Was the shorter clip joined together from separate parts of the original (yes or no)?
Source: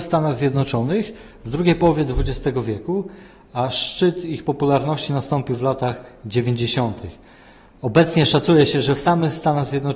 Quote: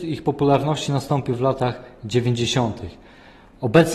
no